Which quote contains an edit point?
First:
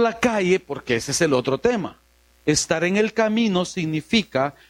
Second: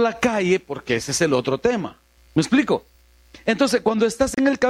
second; 1 cut; at 2.2 s

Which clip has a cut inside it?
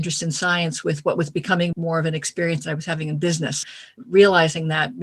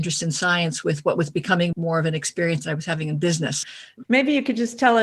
second; 1 cut; at 4.0 s

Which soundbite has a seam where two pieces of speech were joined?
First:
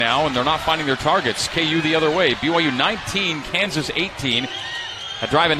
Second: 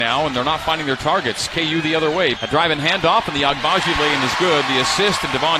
second; 1 cut; at 2.4 s

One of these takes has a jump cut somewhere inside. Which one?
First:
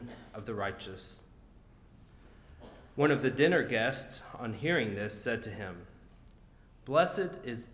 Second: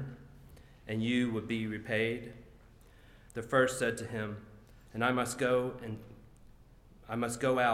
second; 2 cuts; at 3.3 s, 4.9 s

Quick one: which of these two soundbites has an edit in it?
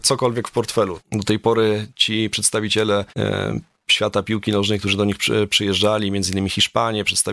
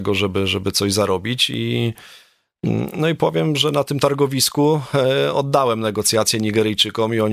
first; 2 cuts; at 1.0 s, 3.1 s

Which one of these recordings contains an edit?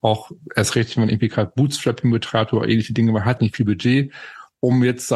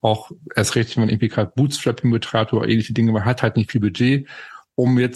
first; 1 cut; at 3.4 s

